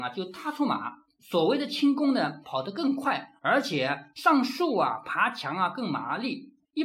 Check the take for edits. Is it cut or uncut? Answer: cut